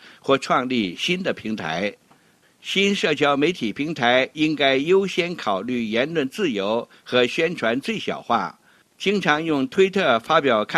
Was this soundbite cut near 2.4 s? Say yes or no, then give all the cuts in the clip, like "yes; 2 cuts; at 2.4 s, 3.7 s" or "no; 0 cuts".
yes; 1 cut; at 2.4 s